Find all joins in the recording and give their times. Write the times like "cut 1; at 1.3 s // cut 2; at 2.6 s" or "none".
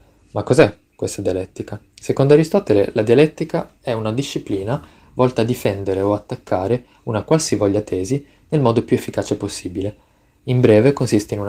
cut 1; at 1.9 s